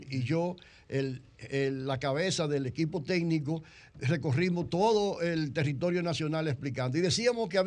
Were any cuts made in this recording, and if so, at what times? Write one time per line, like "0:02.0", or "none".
none